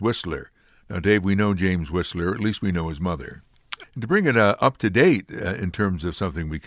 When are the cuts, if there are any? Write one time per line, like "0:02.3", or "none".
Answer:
0:03.8